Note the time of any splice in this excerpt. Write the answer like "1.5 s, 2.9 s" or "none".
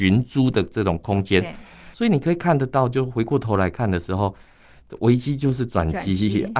1.9 s